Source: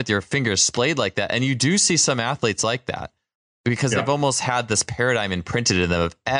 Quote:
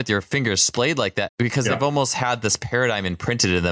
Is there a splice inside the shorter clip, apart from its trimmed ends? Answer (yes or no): yes